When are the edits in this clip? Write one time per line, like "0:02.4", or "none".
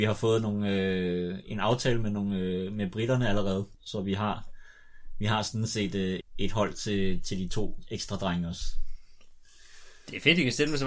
0:03.7
0:06.2